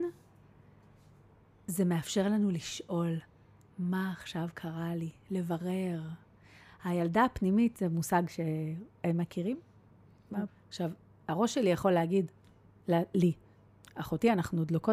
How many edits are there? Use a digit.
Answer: 1